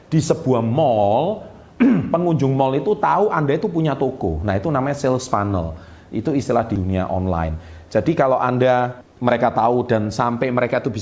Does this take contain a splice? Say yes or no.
no